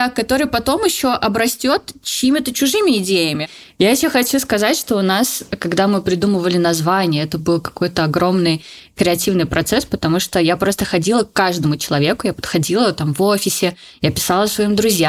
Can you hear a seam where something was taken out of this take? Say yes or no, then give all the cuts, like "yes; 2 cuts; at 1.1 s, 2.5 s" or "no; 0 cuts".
no; 0 cuts